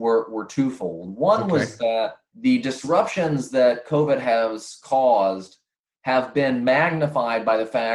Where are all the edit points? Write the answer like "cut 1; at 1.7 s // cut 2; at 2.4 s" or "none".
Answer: cut 1; at 2.3 s